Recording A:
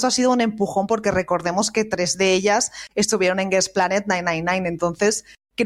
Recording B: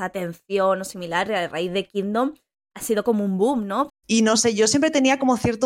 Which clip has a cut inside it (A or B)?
B